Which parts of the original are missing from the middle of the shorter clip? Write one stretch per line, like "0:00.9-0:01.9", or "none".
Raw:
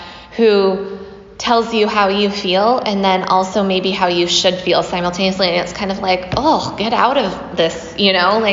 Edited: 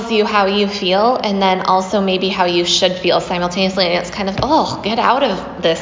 0:06.0-0:06.3

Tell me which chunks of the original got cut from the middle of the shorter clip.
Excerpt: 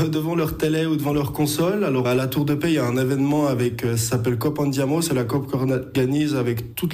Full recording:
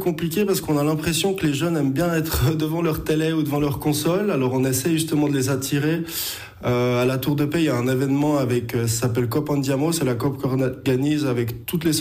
0:04.5-0:07.0

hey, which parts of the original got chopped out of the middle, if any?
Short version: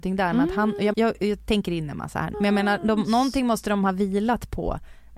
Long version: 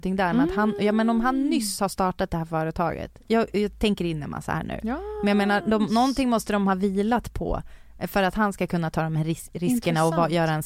0:00.9-0:03.2
0:04.7-0:05.2

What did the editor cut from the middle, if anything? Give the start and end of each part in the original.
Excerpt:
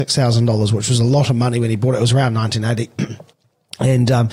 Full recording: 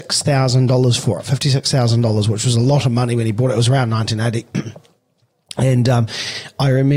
0:04.9-0:05.1

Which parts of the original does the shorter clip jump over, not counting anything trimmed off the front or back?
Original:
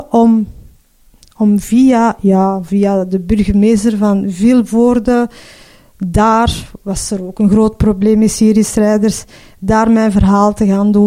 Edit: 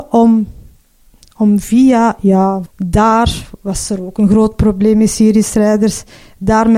0:02.7-0:05.9

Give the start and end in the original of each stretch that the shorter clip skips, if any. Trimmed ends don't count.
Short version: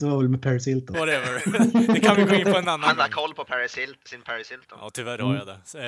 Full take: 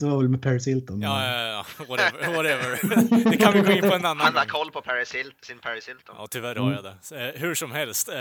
0:00.9-0:02.3

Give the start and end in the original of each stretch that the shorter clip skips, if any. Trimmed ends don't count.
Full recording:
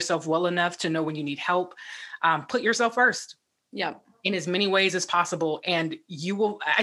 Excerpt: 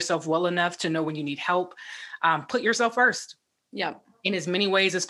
none

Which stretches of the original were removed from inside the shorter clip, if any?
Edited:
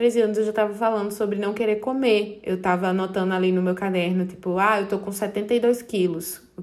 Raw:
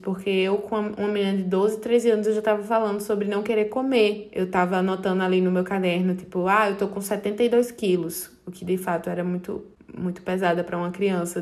none

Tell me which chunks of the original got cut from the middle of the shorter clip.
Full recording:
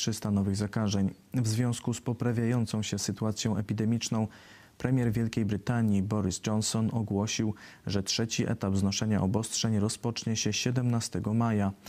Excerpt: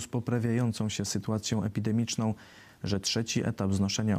0:04.7-0:07.8

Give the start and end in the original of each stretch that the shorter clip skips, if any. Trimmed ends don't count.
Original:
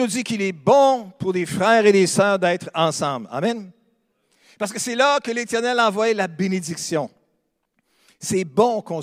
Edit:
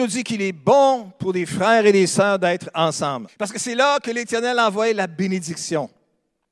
0:03.3-0:04.5

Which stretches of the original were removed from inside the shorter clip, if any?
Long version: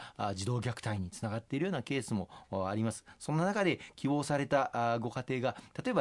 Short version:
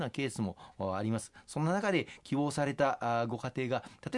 none

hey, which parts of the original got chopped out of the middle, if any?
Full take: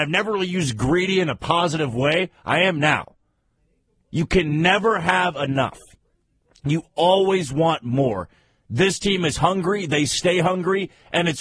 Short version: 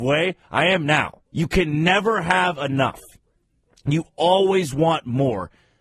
0:03.2-0:04.0

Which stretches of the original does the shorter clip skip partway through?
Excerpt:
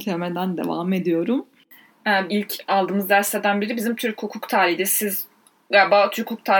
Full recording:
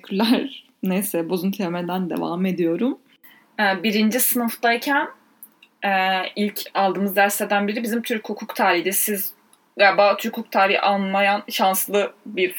0:03.8-0:06.3

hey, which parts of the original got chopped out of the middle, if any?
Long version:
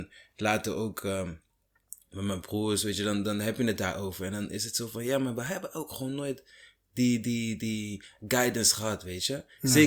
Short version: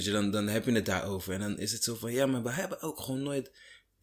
none

